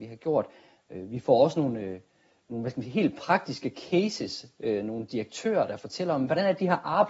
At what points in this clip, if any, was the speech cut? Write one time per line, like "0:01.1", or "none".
none